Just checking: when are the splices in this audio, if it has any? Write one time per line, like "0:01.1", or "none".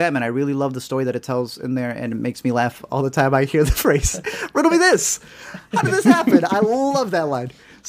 none